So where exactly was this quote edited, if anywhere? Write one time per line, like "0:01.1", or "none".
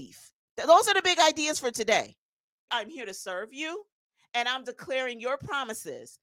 0:02.7